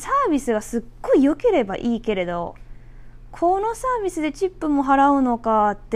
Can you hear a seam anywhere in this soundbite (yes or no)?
no